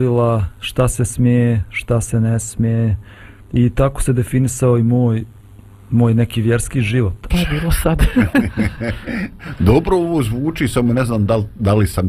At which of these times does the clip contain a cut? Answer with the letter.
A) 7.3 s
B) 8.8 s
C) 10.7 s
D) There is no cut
A